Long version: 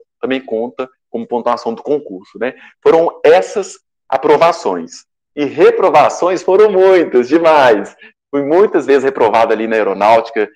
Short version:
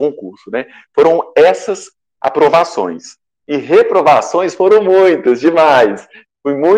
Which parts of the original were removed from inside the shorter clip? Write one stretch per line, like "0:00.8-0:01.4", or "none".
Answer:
none